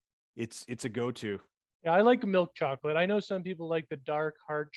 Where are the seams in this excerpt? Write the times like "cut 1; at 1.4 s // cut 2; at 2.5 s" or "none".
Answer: none